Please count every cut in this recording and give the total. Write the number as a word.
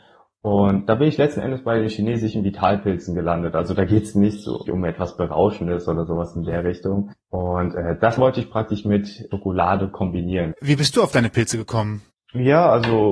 two